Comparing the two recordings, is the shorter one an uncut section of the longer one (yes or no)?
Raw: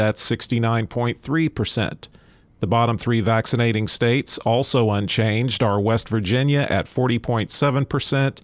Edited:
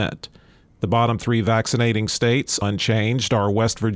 no